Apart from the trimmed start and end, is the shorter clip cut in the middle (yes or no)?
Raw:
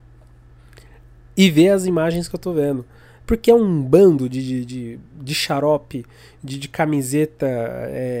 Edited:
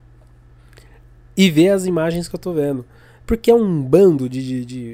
no